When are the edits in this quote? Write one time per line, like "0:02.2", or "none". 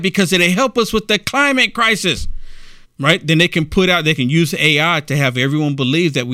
0:02.8